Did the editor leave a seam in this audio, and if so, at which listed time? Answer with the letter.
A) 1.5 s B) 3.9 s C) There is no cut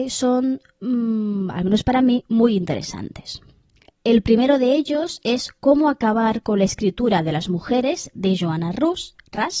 C